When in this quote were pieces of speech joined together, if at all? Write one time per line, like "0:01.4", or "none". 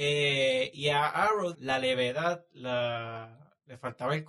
0:01.5